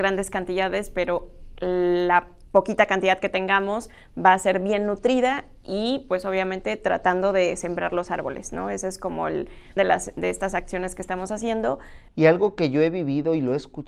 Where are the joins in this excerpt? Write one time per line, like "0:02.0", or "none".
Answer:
0:09.8
0:12.1